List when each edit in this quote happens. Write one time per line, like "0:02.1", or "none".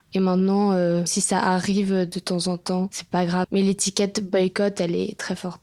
0:03.4